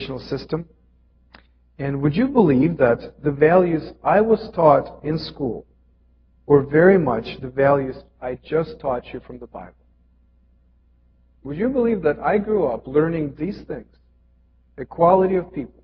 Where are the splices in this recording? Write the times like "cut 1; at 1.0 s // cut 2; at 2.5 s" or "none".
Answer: none